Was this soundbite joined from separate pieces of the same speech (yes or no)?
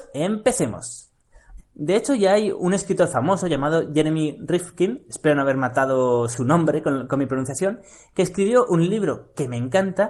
yes